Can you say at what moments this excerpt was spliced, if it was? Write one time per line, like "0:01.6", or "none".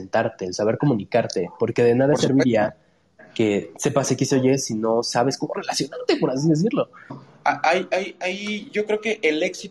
0:07.1